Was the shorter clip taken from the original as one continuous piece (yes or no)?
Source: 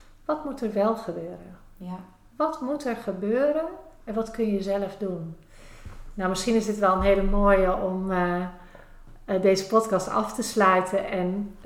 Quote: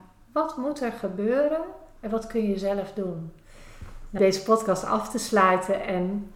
no